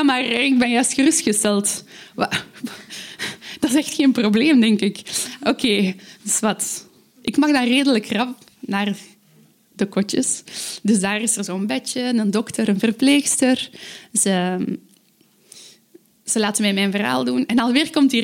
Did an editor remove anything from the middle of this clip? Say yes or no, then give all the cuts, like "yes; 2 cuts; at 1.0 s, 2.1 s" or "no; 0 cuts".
no; 0 cuts